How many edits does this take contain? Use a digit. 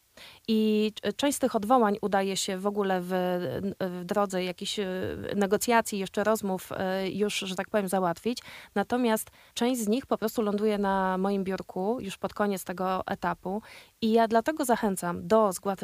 0